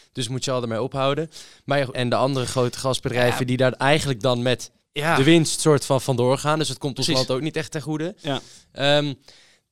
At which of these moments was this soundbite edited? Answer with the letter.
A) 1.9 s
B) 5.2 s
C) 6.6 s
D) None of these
A